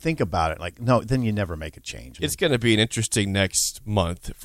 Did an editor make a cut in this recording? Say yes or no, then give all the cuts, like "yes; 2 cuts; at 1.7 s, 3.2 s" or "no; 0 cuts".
yes; 1 cut; at 2.2 s